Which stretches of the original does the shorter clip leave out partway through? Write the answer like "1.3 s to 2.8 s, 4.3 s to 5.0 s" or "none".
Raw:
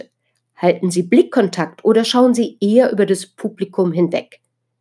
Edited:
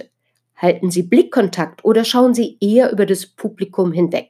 none